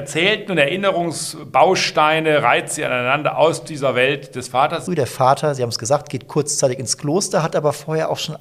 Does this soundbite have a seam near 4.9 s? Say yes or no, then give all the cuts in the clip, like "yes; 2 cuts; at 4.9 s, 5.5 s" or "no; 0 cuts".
yes; 1 cut; at 4.9 s